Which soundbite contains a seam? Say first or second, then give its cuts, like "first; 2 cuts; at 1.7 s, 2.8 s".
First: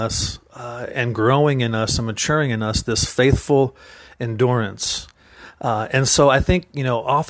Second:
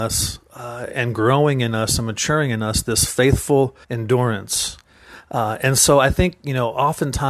second; 1 cut; at 3.8 s